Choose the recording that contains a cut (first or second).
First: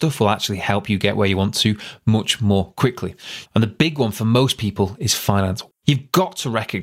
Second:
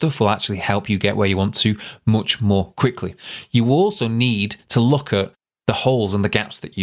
first